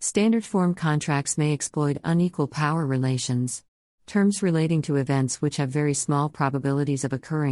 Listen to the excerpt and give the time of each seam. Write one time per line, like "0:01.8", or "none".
0:03.9